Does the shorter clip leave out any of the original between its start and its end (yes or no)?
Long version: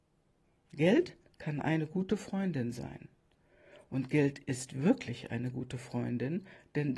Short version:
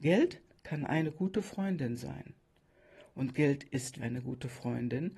yes